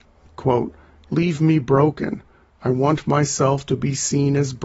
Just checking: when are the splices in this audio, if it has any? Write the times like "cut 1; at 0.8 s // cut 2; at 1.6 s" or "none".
none